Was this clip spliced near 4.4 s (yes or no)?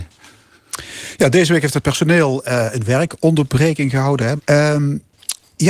yes